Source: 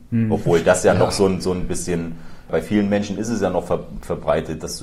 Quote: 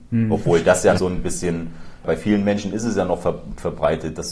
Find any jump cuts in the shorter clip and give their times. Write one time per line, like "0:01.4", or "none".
0:01.0